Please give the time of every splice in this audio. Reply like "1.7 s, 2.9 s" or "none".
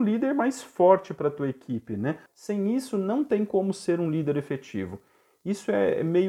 2.3 s